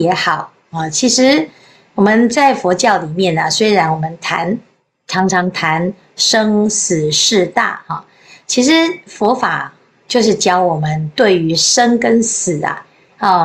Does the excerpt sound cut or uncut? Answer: uncut